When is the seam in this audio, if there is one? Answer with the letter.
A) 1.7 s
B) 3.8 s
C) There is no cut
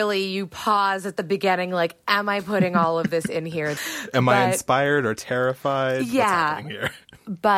B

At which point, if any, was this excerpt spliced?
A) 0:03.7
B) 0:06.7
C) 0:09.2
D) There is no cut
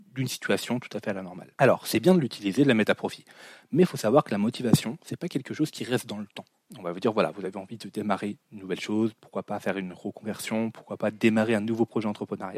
B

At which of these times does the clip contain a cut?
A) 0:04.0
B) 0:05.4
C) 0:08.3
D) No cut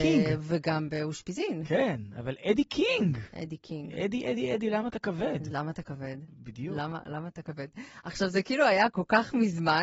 D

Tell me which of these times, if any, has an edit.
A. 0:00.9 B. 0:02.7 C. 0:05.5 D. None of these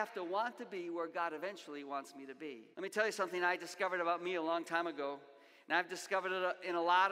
B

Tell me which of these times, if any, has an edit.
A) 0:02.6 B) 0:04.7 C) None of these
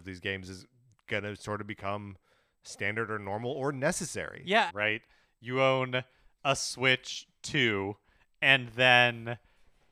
B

